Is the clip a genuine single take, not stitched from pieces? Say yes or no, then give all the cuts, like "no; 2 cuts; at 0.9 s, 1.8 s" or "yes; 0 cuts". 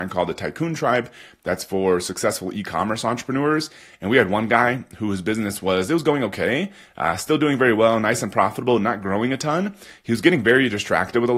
yes; 0 cuts